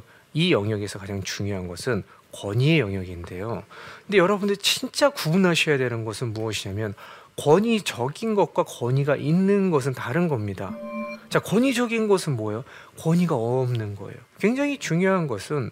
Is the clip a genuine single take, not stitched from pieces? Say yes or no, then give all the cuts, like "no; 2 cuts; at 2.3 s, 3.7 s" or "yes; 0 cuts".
no; 2 cuts; at 4.0 s, 14.4 s